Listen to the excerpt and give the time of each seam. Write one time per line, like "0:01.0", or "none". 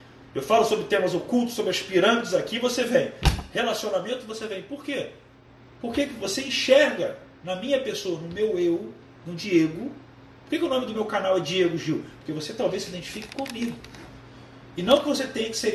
none